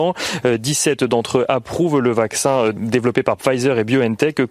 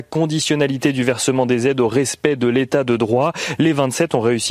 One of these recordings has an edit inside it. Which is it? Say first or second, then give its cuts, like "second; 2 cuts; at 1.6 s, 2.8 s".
first; 1 cut; at 2.8 s